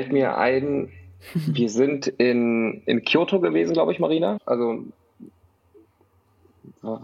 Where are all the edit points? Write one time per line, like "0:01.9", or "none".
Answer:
0:04.4